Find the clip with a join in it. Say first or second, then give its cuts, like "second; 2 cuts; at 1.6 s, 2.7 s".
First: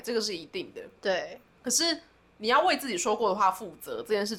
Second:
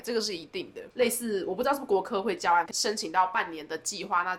second; 2 cuts; at 0.9 s, 2.7 s